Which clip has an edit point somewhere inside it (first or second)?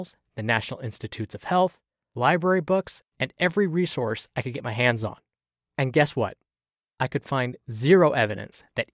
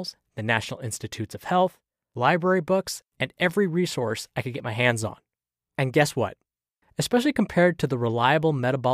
second